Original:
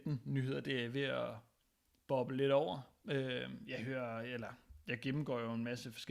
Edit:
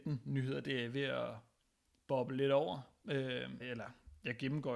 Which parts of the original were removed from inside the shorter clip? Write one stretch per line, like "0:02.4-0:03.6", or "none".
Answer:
0:03.6-0:04.2